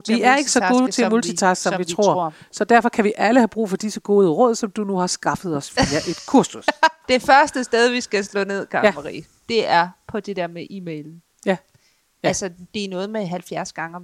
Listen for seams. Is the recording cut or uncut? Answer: cut